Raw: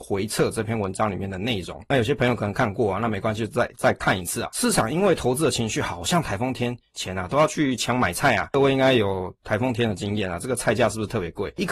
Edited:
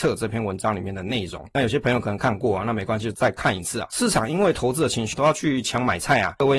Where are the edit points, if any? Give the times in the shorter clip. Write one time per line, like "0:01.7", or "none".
0:03.1
0:05.1